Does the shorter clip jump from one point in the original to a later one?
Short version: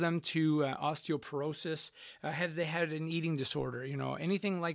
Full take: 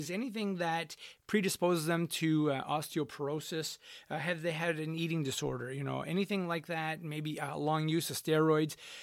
no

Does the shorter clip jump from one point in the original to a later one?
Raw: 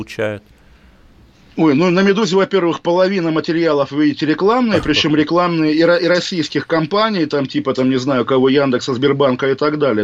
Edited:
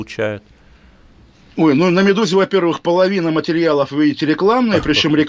no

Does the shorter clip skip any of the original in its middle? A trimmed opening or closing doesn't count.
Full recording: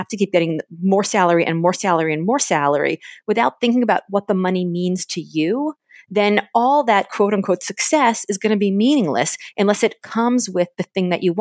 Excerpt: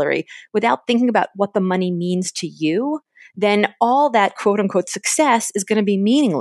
no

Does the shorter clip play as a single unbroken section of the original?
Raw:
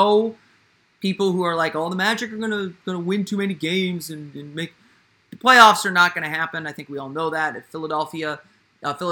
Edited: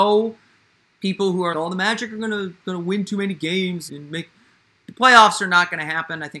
no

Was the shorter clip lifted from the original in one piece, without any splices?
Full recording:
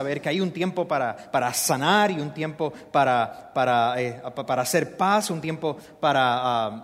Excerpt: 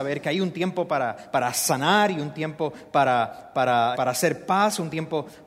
no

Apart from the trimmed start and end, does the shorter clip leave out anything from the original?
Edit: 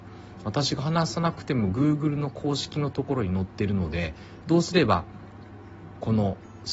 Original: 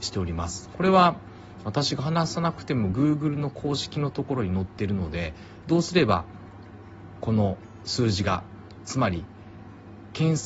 no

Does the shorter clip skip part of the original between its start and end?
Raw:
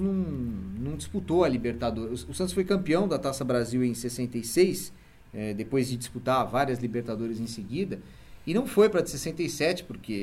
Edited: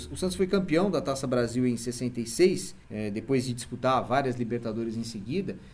yes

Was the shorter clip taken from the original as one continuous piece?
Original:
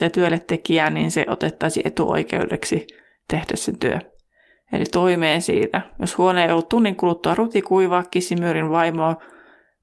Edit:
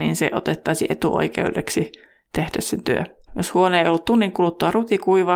no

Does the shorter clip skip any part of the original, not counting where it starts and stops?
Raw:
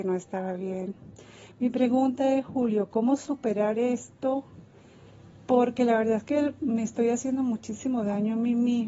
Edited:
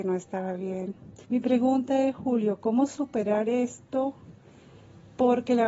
yes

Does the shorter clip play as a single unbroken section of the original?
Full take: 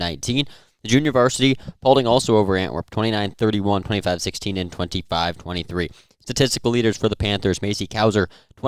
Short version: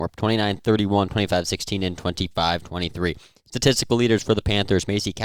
yes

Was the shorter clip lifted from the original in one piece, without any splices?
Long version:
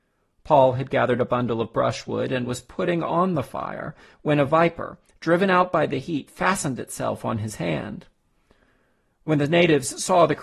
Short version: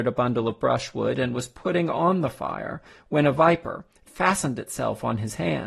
no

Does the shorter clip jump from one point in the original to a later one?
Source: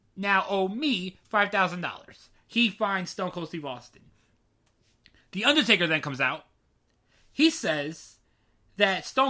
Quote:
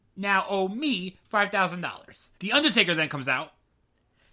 yes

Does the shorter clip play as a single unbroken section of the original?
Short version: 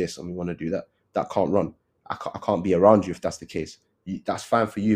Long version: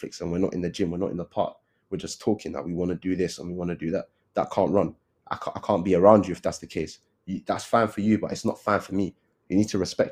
yes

